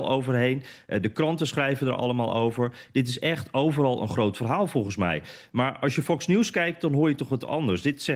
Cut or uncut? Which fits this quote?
uncut